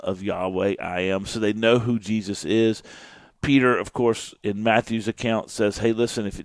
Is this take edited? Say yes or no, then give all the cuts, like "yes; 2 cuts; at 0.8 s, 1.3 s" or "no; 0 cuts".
no; 0 cuts